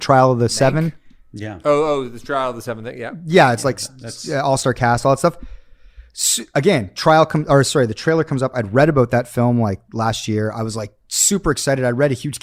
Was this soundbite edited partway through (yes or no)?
no